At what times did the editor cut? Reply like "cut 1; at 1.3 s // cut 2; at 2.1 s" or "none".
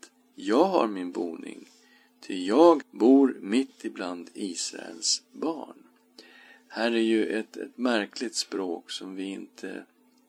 cut 1; at 2.8 s